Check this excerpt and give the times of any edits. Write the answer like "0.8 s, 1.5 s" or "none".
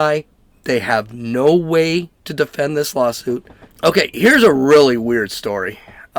3.7 s